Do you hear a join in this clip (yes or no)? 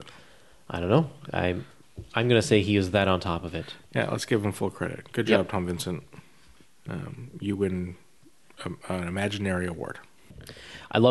no